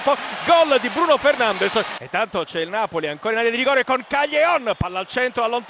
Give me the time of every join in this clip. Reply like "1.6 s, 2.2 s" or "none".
none